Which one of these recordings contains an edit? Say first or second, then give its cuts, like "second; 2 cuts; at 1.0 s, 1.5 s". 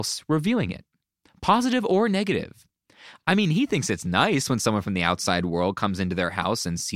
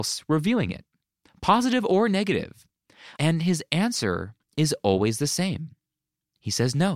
second; 1 cut; at 3.2 s